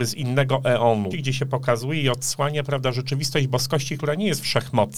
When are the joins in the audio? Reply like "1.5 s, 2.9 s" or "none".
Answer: 1.1 s